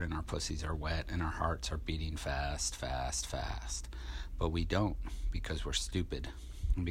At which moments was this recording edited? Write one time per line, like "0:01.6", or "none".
none